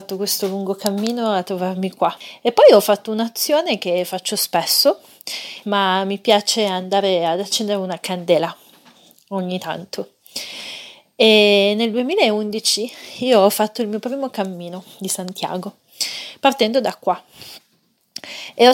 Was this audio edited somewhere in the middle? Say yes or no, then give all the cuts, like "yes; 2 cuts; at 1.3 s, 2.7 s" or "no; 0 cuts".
yes; 1 cut; at 5.6 s